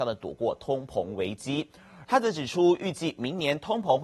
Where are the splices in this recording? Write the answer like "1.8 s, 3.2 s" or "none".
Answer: 2.0 s

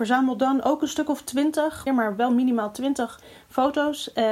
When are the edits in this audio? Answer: 1.9 s

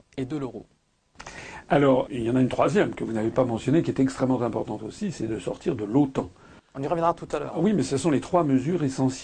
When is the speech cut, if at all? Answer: 2.1 s

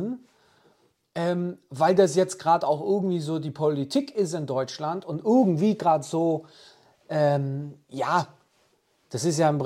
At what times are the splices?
none

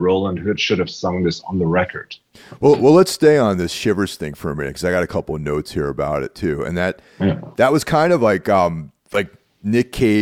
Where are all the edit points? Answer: 9.0 s

